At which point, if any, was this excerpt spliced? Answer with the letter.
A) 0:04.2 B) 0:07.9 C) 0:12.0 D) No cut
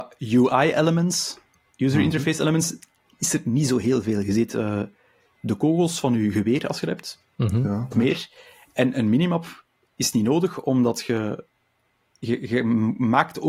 B